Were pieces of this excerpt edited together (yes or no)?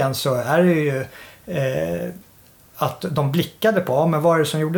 no